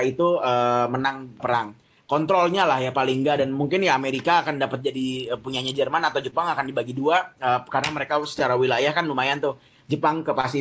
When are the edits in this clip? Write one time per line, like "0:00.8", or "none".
0:01.4